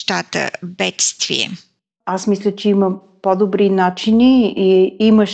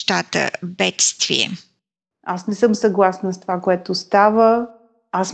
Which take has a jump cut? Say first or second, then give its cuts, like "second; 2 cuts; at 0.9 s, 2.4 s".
first; 1 cut; at 2.0 s